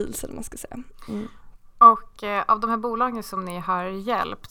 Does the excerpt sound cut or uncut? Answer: uncut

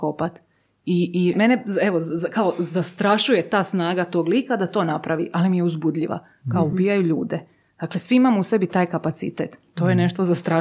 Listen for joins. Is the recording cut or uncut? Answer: cut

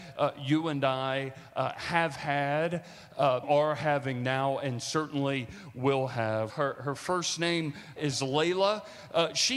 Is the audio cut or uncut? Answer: cut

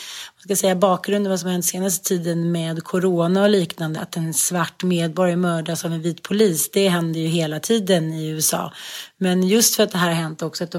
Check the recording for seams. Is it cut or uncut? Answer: cut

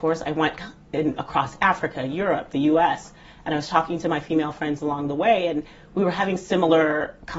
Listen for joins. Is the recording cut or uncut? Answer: uncut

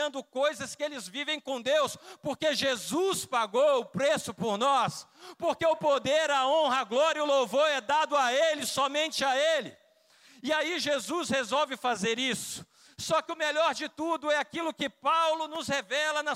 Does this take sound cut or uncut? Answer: uncut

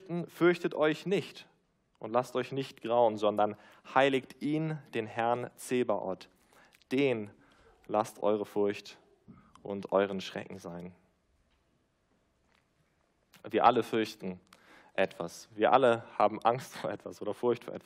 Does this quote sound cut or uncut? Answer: uncut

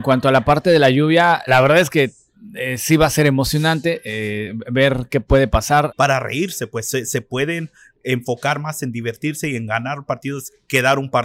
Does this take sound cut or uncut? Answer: cut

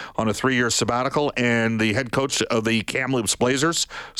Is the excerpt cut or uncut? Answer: uncut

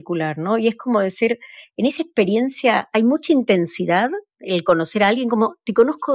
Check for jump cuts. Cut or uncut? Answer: uncut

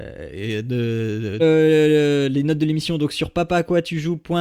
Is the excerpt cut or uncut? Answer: cut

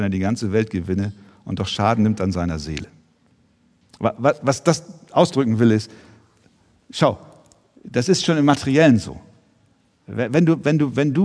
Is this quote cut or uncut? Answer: uncut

